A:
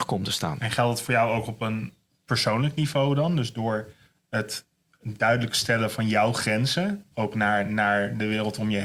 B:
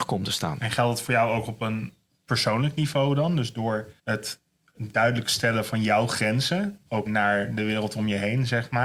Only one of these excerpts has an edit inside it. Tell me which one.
B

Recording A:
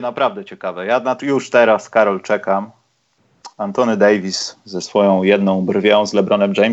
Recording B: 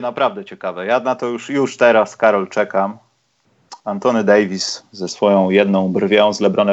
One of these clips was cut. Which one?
A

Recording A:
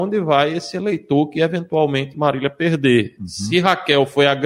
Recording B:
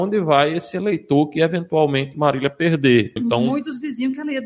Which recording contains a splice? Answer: B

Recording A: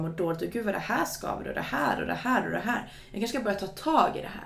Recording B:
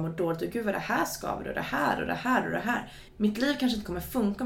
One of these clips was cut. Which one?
B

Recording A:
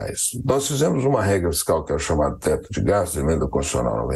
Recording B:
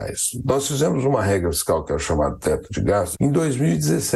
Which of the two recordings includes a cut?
B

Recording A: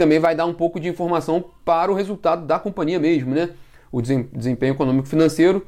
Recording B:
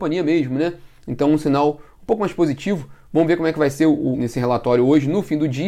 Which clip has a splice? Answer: B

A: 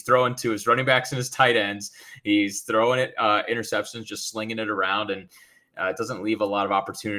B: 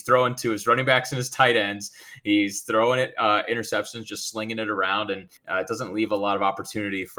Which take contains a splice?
B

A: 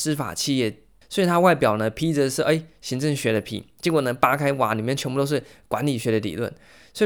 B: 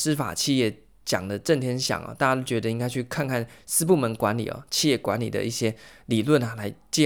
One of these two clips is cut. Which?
A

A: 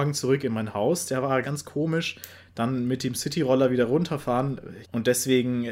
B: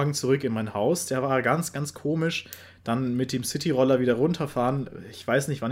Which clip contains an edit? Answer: A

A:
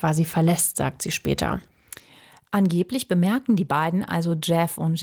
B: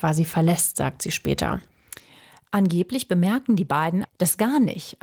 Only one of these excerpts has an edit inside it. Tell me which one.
B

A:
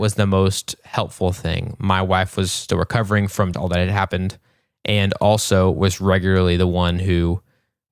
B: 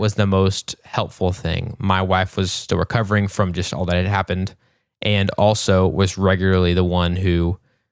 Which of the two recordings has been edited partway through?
A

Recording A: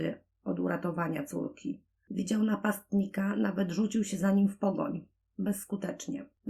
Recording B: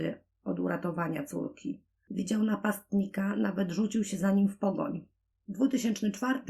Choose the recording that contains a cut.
B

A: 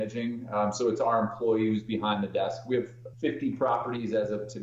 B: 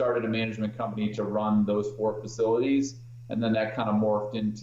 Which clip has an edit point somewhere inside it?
A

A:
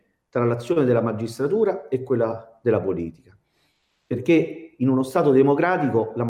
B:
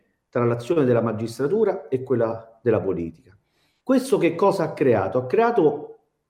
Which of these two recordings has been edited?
B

